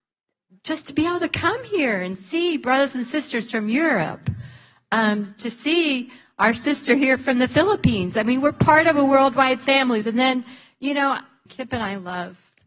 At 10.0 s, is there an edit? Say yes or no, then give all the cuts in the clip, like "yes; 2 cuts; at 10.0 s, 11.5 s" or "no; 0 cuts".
yes; 2 cuts; at 10.0 s, 11.5 s